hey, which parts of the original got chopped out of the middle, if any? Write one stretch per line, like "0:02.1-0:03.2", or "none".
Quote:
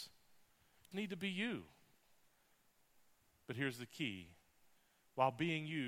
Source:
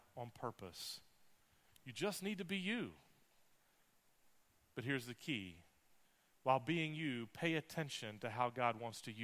0:01.8-0:02.2